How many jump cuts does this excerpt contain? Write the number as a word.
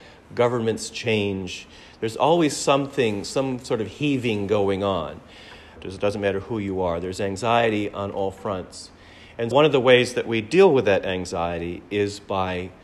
two